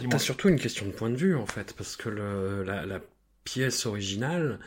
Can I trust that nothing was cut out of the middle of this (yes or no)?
yes